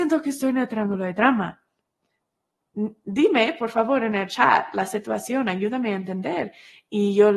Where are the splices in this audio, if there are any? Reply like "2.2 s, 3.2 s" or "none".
none